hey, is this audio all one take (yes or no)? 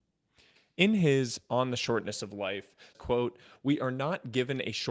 no